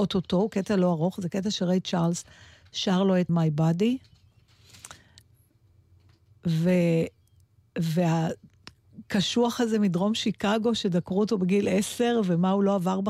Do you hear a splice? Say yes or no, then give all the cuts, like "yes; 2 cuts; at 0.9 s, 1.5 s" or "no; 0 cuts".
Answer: yes; 1 cut; at 3.3 s